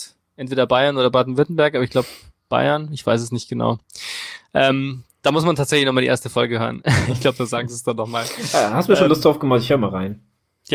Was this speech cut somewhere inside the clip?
no; 0 cuts

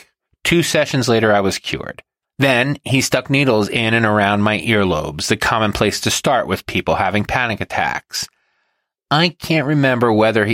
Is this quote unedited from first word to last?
no; 1 cut; at 2.2 s

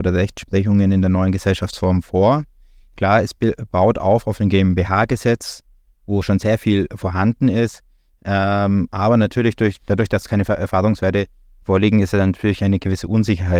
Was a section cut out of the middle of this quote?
no; 0 cuts

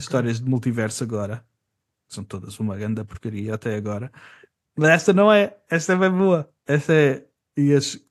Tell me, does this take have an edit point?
yes; 1 cut; at 6.6 s

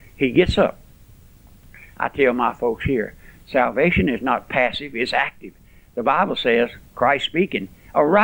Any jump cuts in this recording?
no; 0 cuts

